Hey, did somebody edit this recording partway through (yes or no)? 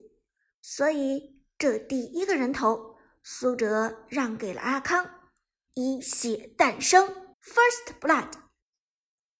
yes